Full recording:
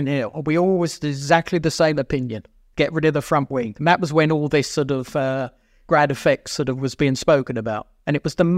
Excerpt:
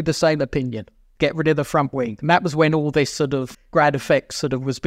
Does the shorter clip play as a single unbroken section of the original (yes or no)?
no